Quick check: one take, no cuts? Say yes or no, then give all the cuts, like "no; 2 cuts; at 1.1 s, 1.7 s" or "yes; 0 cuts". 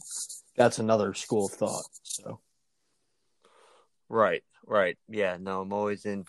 no; 1 cut; at 5.0 s